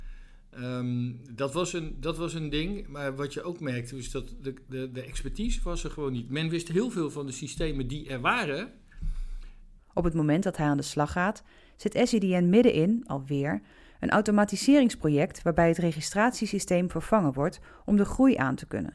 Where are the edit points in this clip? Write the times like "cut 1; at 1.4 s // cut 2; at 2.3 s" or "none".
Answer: cut 1; at 9.8 s